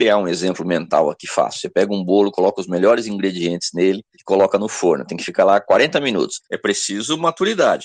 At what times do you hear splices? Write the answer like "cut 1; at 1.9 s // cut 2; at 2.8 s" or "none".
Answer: cut 1; at 6.5 s